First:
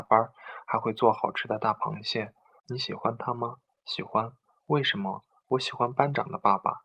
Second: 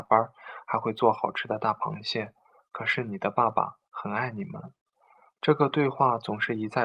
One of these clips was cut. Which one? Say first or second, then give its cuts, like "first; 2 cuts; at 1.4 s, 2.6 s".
first; 1 cut; at 2.6 s